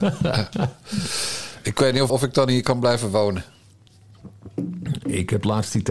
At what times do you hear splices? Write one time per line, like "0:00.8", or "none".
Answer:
0:02.1